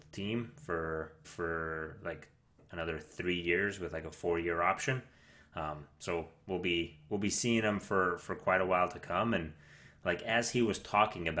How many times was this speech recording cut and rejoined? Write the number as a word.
one